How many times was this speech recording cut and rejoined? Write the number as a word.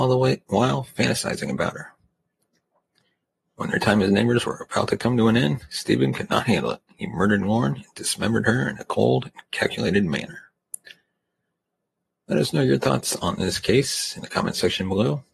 zero